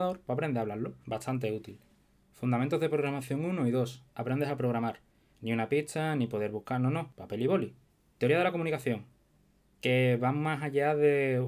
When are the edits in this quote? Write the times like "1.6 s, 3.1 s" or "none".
5.3 s